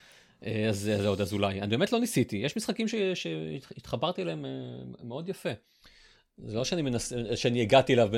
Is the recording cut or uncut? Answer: uncut